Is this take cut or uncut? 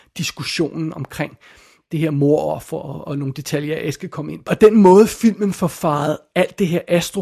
cut